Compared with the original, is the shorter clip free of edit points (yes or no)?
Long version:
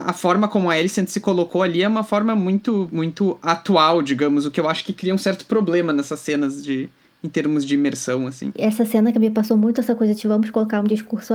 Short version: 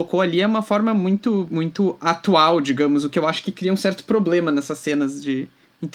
yes